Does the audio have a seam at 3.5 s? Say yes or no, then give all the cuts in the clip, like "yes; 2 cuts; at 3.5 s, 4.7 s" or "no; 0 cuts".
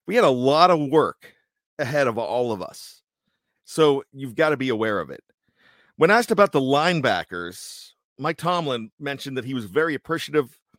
yes; 1 cut; at 3.5 s